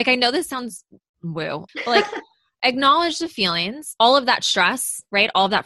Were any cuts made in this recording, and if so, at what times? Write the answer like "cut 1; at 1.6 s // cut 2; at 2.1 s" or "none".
cut 1; at 1.7 s // cut 2; at 4.0 s